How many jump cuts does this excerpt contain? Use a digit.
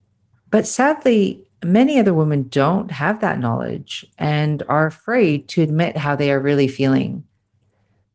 0